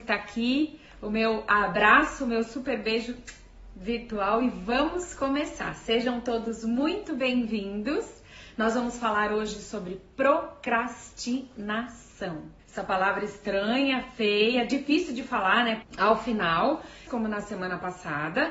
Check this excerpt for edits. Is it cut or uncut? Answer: cut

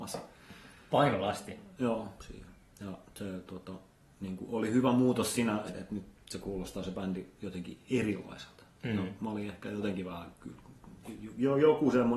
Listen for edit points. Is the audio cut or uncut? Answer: cut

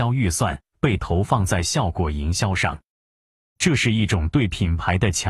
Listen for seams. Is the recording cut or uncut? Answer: cut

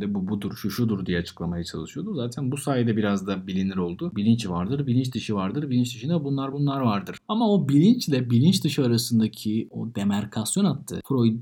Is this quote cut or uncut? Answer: cut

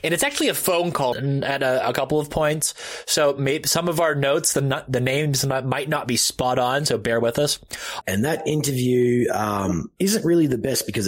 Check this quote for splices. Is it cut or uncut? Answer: cut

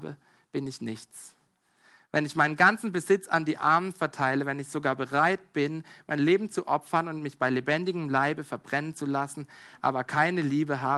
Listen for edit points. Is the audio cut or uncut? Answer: uncut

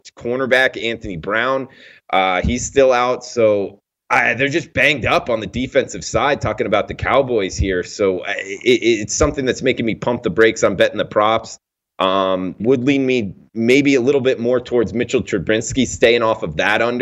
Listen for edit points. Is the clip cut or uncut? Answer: cut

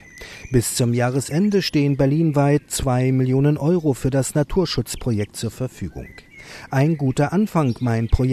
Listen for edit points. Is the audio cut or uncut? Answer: uncut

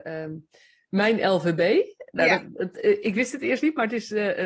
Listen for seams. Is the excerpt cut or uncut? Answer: uncut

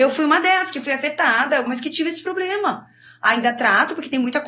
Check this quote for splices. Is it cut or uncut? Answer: cut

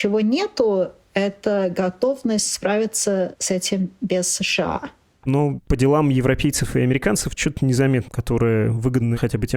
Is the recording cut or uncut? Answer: cut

